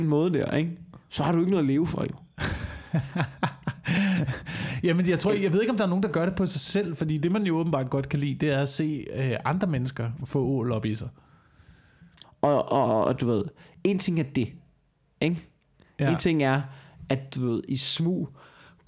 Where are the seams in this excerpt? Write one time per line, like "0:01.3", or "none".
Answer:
0:12.2